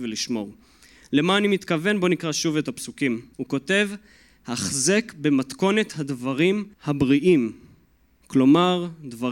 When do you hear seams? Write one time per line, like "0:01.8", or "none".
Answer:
0:03.3
0:06.7